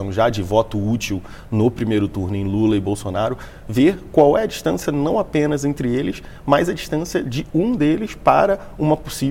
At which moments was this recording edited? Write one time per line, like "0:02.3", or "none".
none

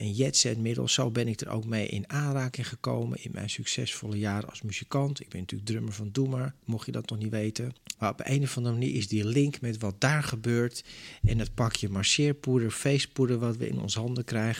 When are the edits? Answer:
0:07.9

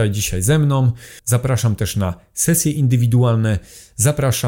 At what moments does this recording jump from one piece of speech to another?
0:01.2

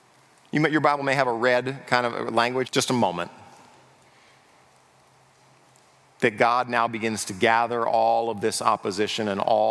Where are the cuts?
0:02.6

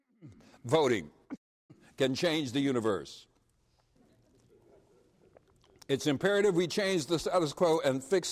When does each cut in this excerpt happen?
0:04.0

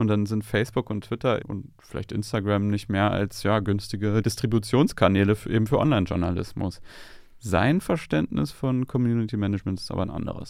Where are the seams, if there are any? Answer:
0:01.4

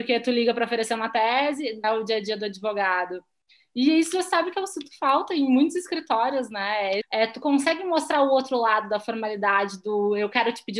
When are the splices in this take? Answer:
0:01.8
0:07.0

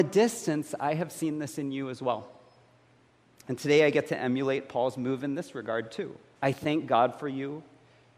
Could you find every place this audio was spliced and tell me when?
0:06.4

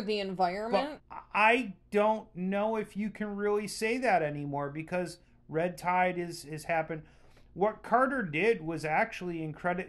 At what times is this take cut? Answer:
0:01.0

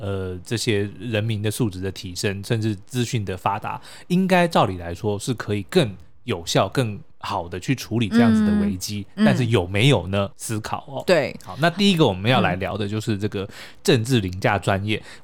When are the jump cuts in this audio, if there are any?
0:07.1
0:10.3

